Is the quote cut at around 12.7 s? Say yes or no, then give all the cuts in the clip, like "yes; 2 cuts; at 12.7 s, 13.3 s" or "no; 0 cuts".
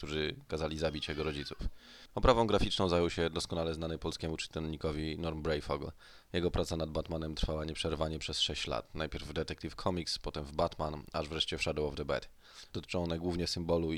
yes; 2 cuts; at 2.1 s, 12.7 s